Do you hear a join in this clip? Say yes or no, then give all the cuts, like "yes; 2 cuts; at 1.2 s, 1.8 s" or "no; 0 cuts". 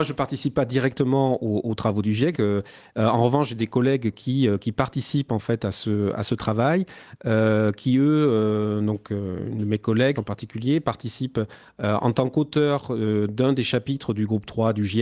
yes; 2 cuts; at 2.3 s, 10.2 s